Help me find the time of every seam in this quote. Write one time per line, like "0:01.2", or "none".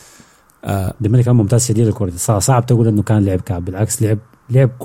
none